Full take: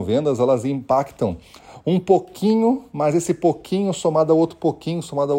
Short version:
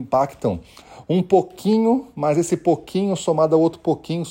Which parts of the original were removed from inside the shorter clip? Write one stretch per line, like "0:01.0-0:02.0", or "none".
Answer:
none

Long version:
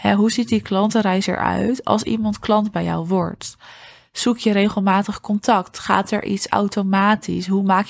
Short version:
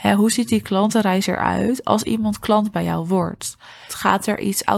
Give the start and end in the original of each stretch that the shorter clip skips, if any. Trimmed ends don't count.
0:03.9-0:05.7

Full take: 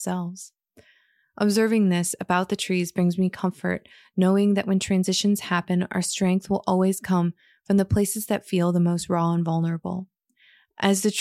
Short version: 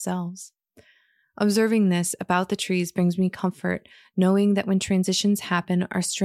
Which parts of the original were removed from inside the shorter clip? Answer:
none

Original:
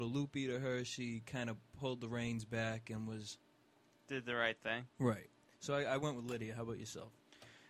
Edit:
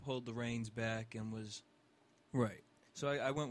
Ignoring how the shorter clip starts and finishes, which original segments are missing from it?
0:04.0-0:04.9

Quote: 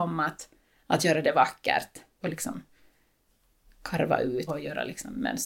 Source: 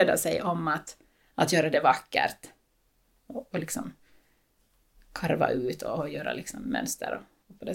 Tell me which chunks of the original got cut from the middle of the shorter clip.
0:02.7-0:03.5
0:05.8-0:06.0

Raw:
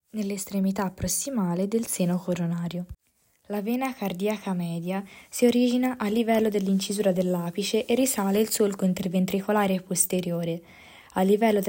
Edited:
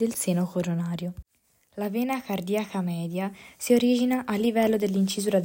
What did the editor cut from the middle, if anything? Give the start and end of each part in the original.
none

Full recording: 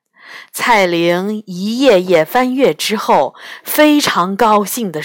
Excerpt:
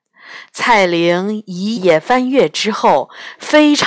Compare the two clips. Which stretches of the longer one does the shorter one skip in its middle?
0:01.8-0:02.0

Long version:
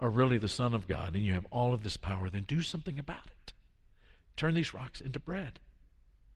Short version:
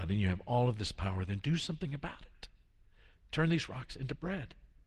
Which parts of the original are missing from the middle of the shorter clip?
none

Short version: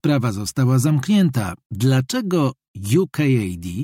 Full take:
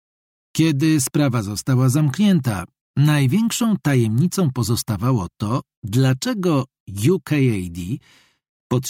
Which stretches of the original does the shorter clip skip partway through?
0:02.8-0:05.8

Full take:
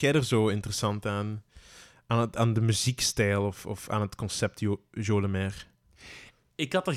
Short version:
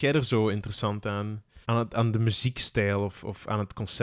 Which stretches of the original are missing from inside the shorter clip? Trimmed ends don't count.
0:01.6-0:02.0

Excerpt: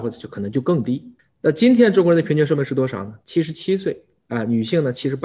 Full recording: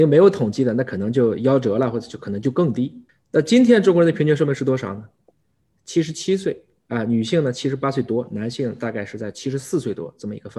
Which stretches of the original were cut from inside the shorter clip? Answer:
0:05.1-0:05.8

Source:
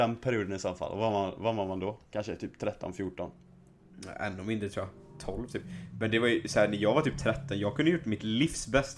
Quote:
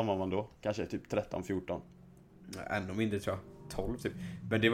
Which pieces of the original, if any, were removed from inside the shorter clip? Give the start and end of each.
none

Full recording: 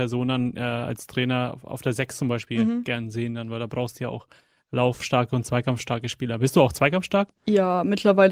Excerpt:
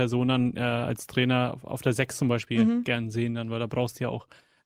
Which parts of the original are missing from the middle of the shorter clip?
none

